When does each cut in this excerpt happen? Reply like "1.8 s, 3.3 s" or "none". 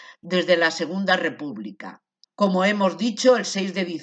2.2 s